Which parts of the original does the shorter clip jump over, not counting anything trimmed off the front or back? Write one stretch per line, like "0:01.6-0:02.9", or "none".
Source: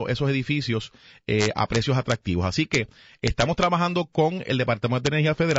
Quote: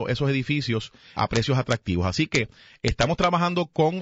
0:01.1-0:01.5